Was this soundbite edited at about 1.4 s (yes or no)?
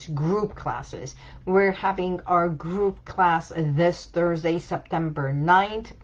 yes